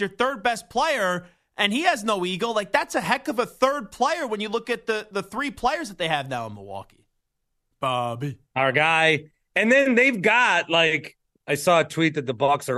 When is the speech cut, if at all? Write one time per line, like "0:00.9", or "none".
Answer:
0:07.7